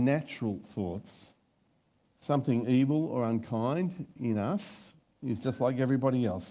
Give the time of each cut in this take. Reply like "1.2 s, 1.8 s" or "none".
2.1 s